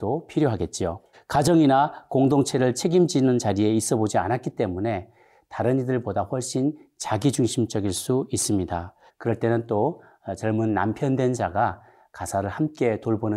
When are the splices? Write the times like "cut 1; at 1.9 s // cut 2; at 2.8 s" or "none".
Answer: cut 1; at 1.1 s // cut 2; at 9.1 s